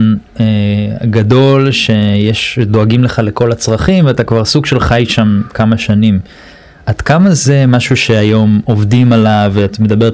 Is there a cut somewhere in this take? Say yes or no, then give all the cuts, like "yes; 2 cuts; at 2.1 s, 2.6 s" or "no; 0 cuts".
no; 0 cuts